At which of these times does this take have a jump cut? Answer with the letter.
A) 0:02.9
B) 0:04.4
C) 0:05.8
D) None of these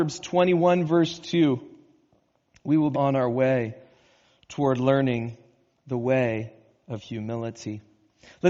A